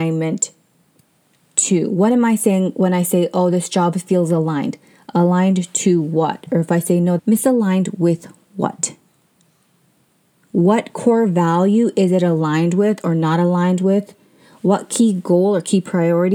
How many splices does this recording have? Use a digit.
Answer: 1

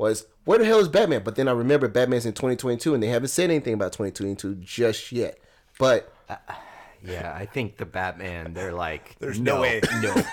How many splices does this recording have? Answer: 0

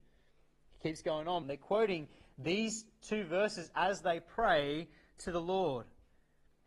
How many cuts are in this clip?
1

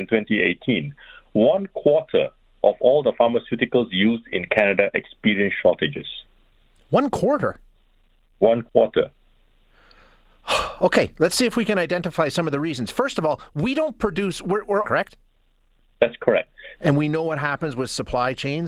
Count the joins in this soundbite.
2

